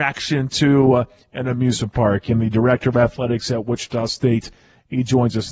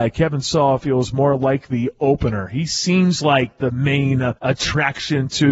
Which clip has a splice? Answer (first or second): second